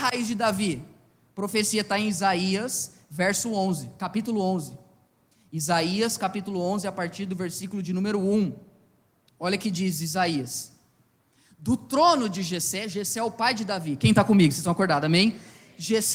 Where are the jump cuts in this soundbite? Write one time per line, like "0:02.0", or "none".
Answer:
none